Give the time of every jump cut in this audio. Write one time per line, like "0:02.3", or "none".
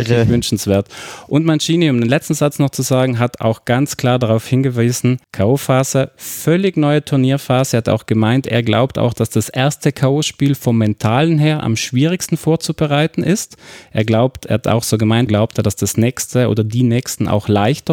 0:05.2
0:15.3

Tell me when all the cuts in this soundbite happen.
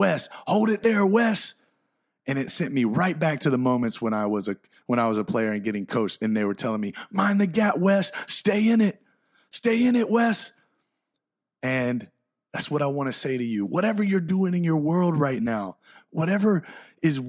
none

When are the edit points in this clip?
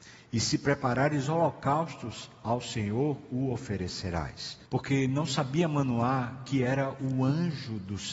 0:04.7

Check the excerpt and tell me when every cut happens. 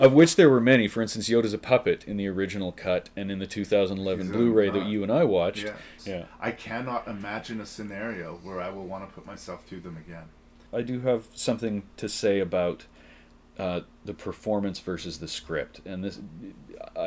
0:06.0

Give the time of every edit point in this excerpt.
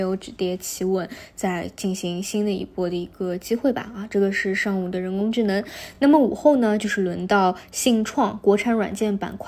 none

